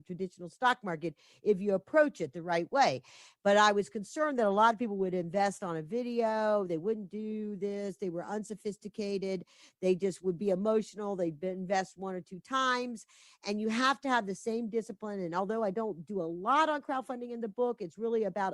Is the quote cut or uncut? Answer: uncut